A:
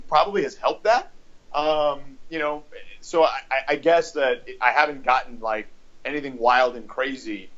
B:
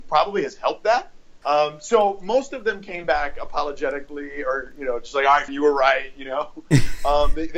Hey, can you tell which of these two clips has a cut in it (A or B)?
B